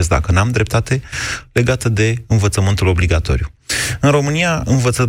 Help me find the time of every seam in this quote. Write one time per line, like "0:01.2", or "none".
none